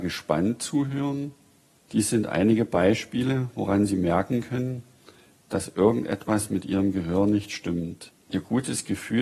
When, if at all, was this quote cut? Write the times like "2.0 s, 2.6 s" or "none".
1.8 s